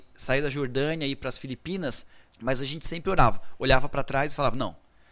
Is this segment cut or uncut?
cut